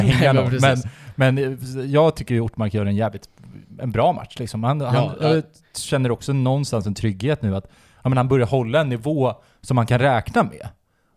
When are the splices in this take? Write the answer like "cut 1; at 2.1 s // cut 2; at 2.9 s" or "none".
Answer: none